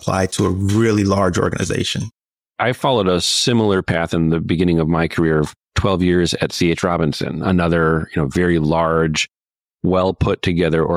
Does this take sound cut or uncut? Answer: cut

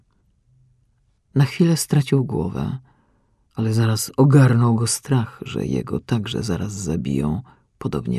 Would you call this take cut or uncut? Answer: cut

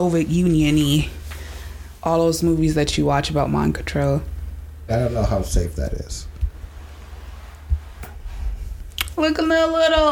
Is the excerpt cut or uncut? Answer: cut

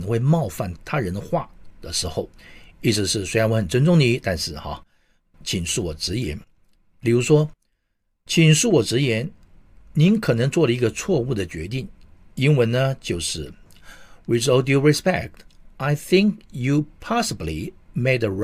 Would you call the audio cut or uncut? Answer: uncut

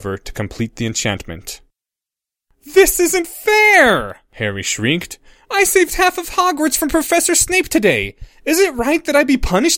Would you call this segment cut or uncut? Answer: uncut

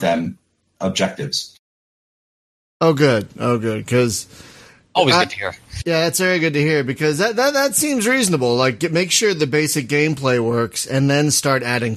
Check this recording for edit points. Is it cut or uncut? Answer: uncut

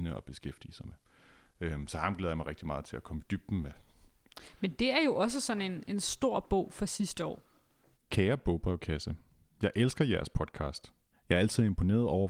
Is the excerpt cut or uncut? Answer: cut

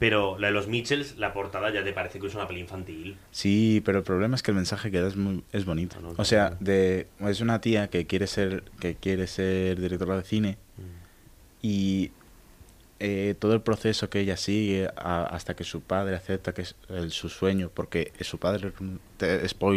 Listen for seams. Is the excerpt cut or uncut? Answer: cut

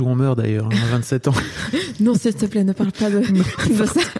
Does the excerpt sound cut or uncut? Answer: uncut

